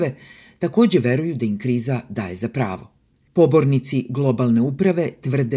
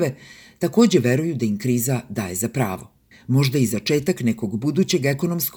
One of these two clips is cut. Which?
second; 1 cut; at 3.1 s

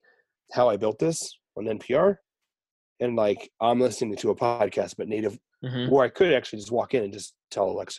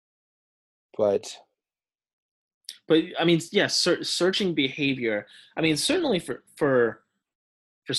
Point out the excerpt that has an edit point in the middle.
first; 1 cut; at 5.5 s

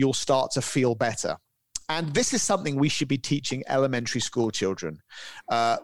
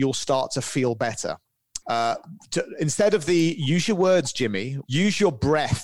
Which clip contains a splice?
second; 2 cuts; at 1.8 s, 4.8 s

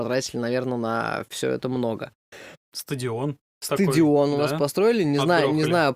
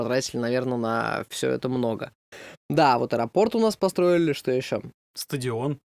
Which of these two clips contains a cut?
first; 1 cut; at 2.6 s

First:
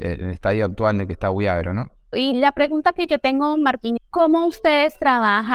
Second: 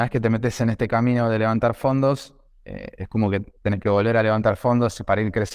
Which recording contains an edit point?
first; 2 cuts; at 2.1 s, 4.0 s

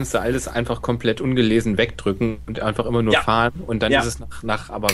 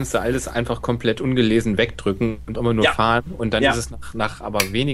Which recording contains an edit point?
second; 1 cut; at 2.5 s

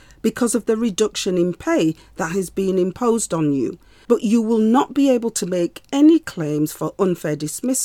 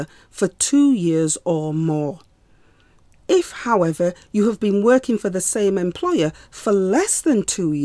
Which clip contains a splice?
first; 1 cut; at 4.0 s

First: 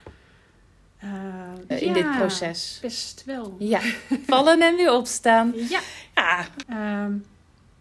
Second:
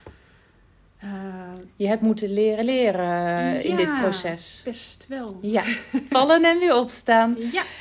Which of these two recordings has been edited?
first; 2 cuts; at 1.7 s, 6.6 s

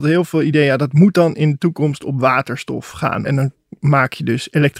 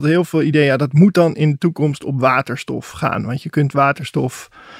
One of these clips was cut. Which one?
first; 1 cut; at 3.2 s

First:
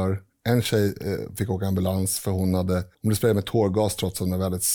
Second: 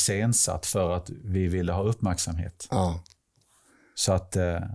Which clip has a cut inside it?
first; 1 cut; at 2.9 s

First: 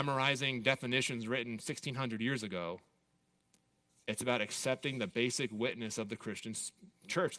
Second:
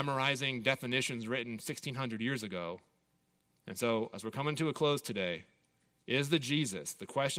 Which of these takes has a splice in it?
second; 1 cut; at 3.5 s

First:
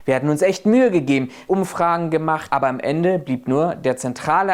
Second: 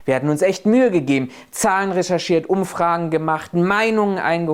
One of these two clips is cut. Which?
first; 2 cuts; at 1.5 s, 2.5 s

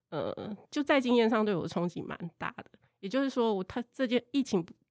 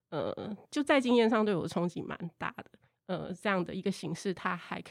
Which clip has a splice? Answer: second; 1 cut; at 2.9 s

